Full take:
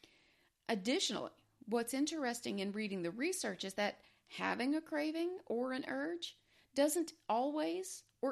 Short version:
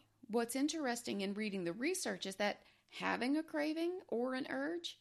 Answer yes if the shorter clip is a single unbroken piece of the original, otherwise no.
yes